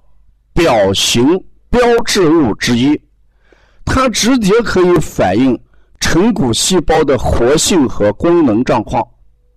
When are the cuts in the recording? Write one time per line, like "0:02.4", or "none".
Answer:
none